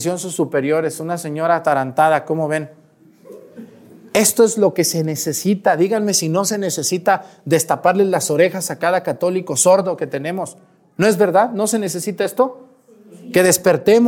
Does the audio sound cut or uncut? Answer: uncut